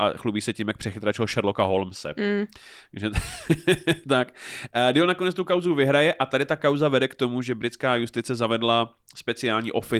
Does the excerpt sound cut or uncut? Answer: uncut